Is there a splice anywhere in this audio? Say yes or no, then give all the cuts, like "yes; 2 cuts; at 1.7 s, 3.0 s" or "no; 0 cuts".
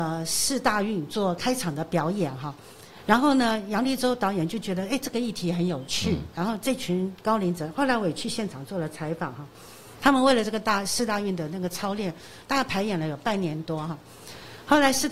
no; 0 cuts